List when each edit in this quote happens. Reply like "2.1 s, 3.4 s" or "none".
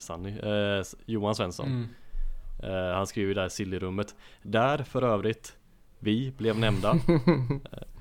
none